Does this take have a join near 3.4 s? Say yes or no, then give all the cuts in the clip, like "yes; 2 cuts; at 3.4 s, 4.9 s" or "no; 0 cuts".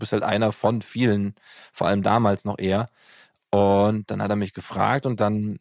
no; 0 cuts